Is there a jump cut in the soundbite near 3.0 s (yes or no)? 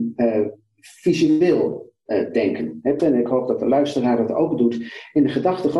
yes